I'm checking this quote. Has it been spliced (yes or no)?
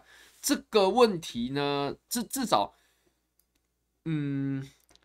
yes